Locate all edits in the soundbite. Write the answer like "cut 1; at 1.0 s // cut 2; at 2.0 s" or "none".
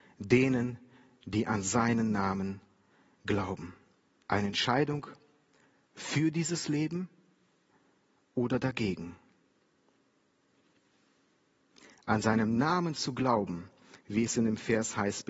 cut 1; at 4.2 s